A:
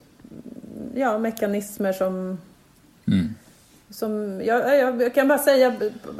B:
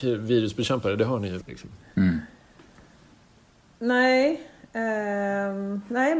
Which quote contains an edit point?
B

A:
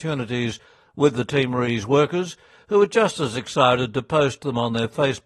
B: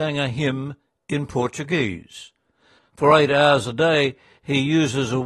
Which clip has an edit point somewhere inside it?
B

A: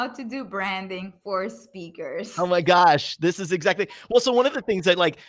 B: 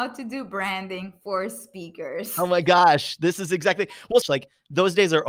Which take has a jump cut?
B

